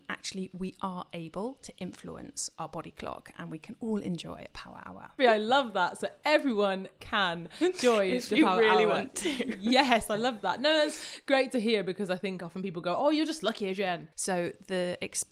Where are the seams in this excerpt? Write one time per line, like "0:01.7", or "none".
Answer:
0:05.2
0:14.1